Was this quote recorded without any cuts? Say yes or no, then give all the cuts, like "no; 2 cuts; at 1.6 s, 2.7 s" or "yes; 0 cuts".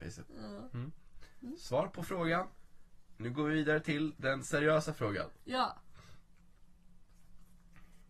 yes; 0 cuts